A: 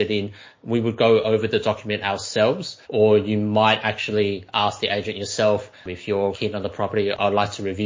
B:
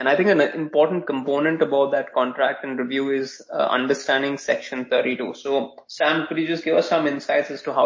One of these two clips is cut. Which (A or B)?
A